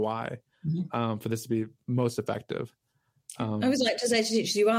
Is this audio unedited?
yes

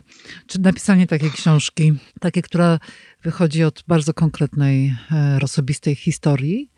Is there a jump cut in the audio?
yes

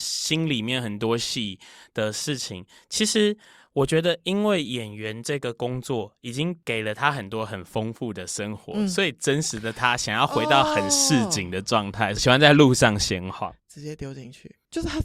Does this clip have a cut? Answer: yes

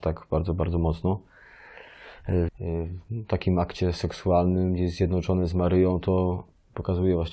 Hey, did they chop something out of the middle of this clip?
yes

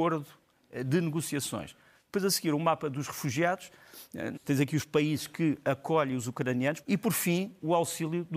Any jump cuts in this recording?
yes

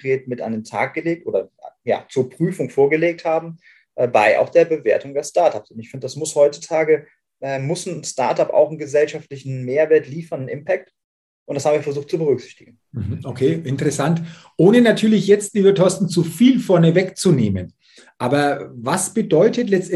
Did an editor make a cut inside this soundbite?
no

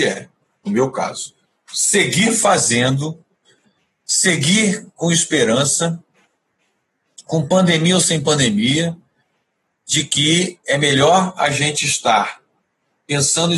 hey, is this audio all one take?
yes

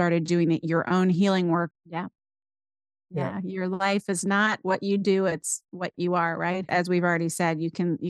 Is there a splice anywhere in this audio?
yes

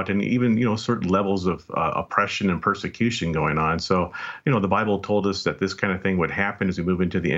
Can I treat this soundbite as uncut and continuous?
yes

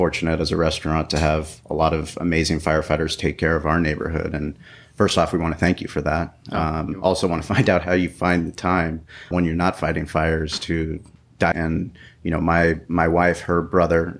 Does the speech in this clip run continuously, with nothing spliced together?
no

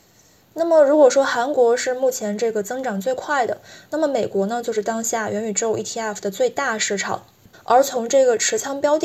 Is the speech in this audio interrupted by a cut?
yes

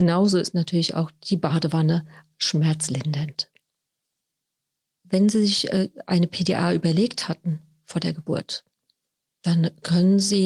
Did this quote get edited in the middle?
no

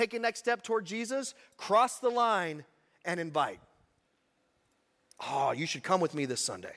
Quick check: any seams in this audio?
no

